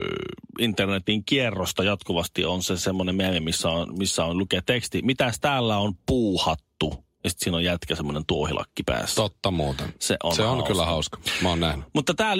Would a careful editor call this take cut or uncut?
uncut